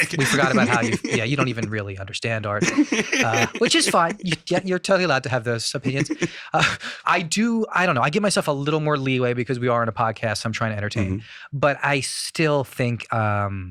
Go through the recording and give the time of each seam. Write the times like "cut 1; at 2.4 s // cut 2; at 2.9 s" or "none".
cut 1; at 7.0 s